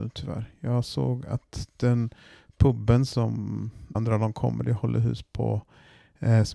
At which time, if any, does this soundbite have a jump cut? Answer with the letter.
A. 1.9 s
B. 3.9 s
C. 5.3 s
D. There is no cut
B